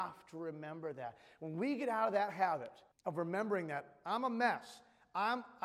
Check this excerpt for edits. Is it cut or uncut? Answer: cut